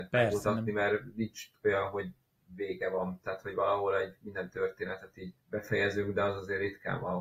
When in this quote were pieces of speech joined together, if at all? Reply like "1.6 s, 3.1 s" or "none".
5.4 s